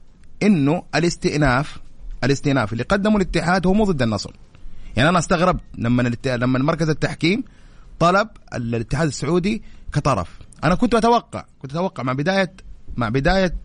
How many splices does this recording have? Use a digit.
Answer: 0